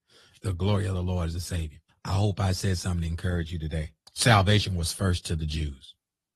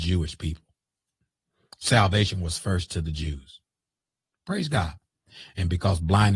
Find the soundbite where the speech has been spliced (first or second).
first